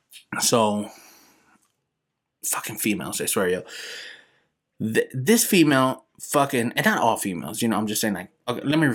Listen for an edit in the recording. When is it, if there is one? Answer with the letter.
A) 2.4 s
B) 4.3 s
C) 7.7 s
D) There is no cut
D